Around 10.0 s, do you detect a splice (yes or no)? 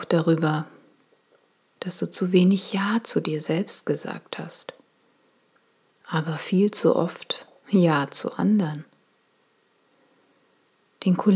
no